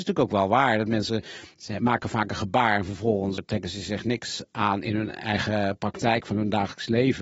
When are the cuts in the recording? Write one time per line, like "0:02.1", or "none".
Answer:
0:03.4

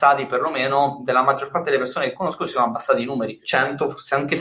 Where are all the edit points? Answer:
0:03.4

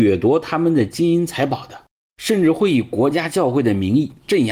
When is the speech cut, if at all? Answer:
0:02.0

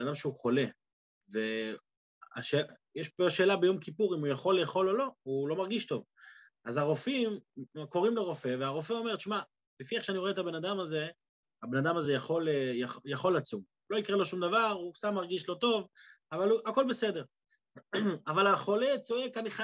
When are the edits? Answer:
none

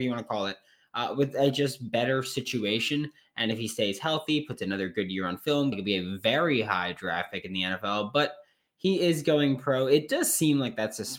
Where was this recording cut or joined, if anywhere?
0:05.7

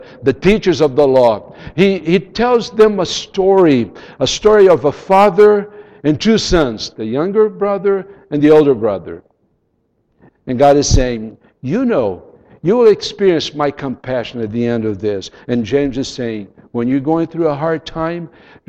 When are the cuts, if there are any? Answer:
0:10.3

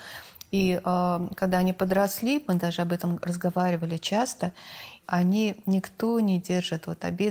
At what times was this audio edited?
0:05.0

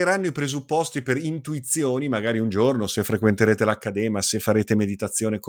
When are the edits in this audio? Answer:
none

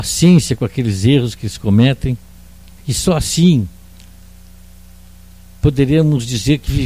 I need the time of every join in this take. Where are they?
0:02.8

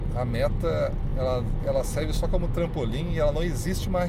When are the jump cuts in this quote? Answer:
none

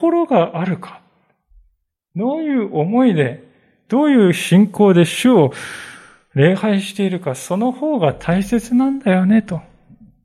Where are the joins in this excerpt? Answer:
none

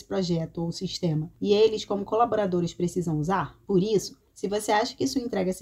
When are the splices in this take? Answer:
0:03.7

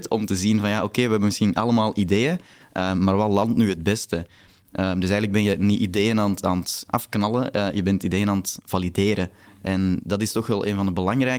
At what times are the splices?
none

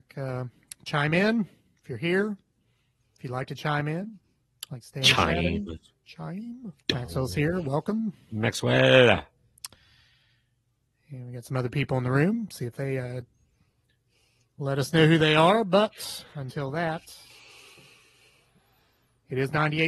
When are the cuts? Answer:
0:06.8

